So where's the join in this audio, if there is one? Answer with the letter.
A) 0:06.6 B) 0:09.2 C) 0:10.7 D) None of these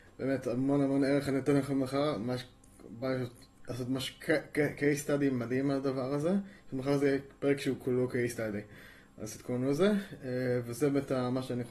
D